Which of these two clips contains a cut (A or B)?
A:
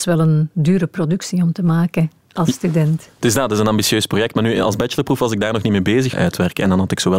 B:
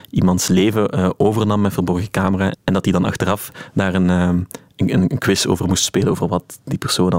A